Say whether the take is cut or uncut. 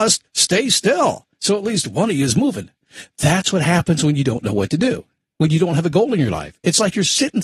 uncut